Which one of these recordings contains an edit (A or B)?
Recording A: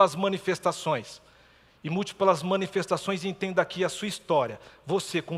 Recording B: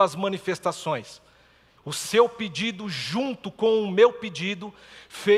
B